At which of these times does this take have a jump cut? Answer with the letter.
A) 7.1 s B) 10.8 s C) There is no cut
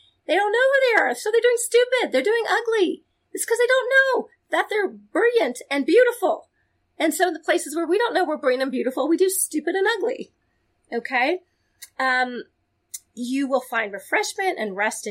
C